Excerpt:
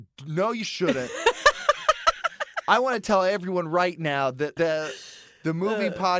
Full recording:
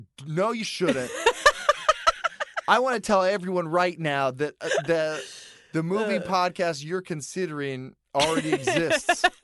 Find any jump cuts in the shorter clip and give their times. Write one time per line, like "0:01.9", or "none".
0:04.6